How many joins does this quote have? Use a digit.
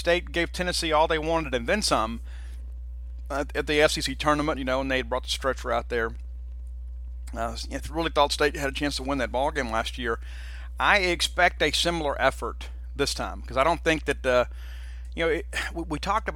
1